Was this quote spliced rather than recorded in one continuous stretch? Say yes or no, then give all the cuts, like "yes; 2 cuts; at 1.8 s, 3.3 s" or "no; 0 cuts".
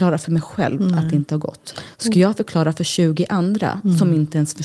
no; 0 cuts